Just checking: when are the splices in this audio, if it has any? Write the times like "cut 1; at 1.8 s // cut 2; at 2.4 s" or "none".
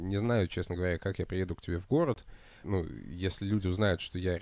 cut 1; at 2.6 s